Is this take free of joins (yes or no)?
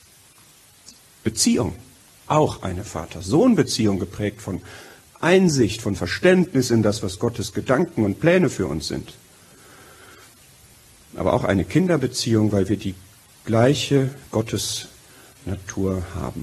no